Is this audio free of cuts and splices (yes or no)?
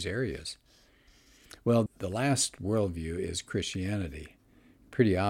no